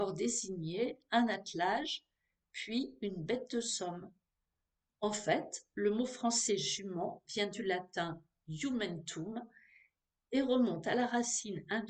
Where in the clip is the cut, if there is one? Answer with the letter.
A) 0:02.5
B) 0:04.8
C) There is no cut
B